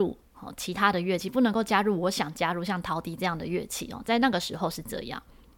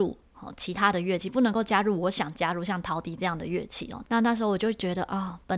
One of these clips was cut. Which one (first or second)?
second